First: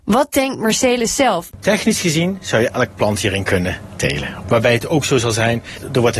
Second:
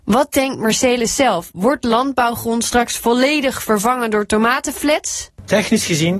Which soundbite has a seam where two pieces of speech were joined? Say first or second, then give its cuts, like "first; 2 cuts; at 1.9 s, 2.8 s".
first; 2 cuts; at 1.5 s, 4.4 s